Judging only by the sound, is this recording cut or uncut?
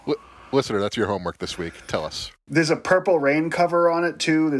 uncut